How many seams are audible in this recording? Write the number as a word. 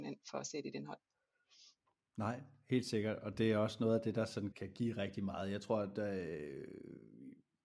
one